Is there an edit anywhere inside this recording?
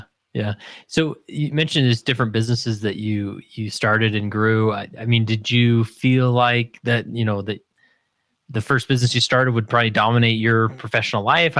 no; 0 cuts

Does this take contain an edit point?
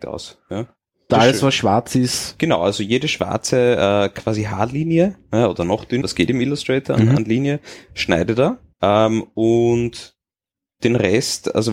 yes; 3 cuts; at 1.1 s, 6.0 s, 8.7 s

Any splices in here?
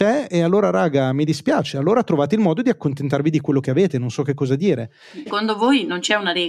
yes; 1 cut; at 5.3 s

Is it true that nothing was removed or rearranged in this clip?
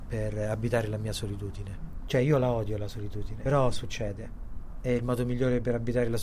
yes; 0 cuts

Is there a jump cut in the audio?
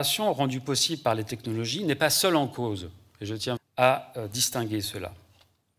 yes; 1 cut; at 3.6 s

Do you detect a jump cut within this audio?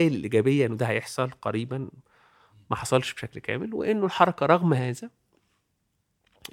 no; 0 cuts

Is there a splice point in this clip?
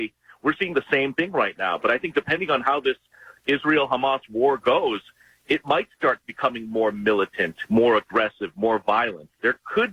no; 0 cuts

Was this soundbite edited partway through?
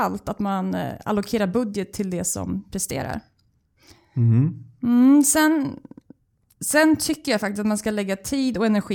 no; 0 cuts

